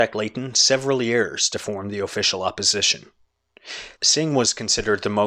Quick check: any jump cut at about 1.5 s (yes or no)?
no